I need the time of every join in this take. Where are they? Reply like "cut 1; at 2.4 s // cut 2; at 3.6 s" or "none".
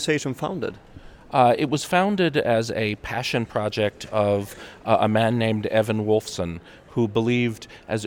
none

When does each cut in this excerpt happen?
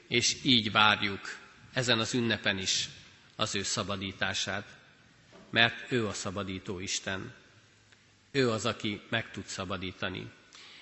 none

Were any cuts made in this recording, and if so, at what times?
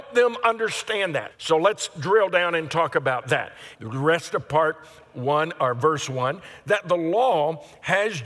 cut 1; at 1.3 s // cut 2; at 3.7 s

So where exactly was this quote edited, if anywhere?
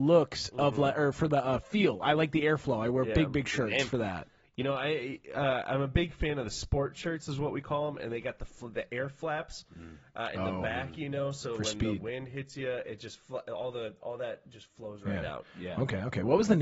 none

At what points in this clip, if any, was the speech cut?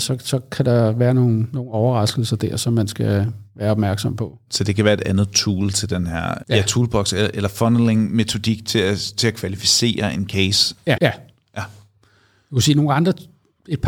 cut 1; at 6.4 s // cut 2; at 11.0 s

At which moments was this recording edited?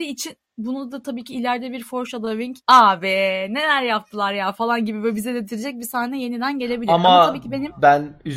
cut 1; at 2.6 s

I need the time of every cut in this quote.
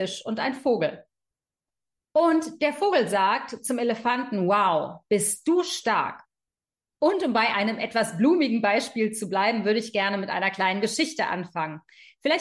cut 1; at 6.9 s

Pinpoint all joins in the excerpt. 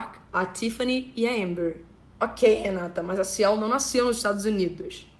none

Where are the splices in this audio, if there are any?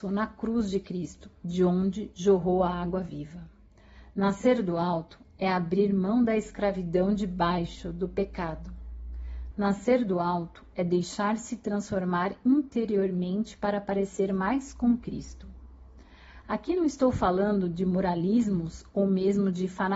cut 1; at 9.5 s

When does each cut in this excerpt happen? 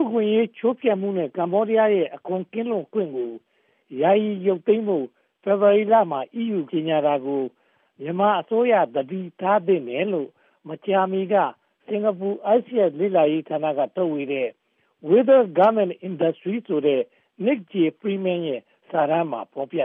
cut 1; at 6.7 s

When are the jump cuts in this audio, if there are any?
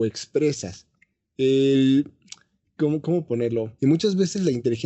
cut 1; at 3.8 s

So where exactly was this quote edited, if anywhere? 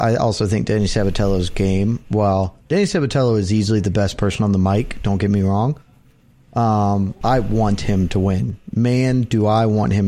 cut 1; at 7.2 s

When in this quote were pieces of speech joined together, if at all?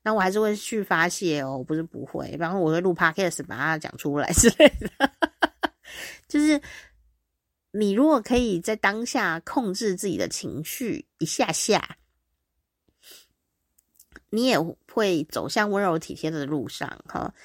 none

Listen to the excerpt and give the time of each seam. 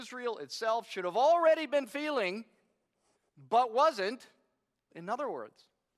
cut 1; at 4.9 s

